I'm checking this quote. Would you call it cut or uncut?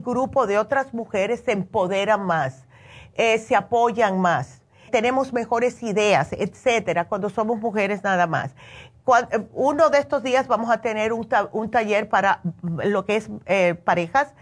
cut